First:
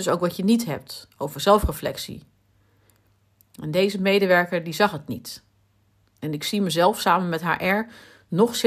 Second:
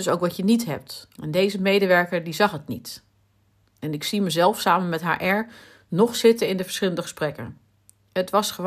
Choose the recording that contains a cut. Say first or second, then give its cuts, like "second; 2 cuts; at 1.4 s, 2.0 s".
second; 1 cut; at 1.2 s